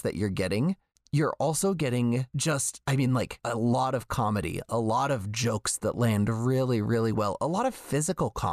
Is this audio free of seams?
yes; 0 cuts

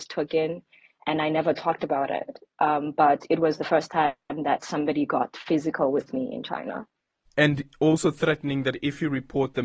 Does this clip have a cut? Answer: yes; 1 cut; at 7.2 s

